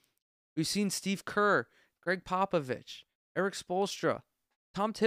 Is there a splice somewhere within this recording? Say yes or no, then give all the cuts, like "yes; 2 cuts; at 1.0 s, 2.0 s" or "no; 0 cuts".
no; 0 cuts